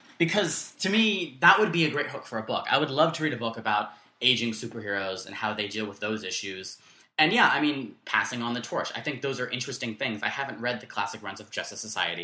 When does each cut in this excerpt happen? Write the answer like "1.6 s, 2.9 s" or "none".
none